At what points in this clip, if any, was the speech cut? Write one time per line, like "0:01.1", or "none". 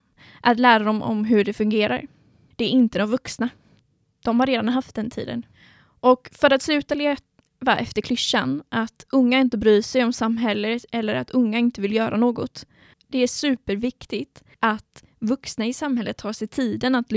0:02.5
0:12.9
0:14.5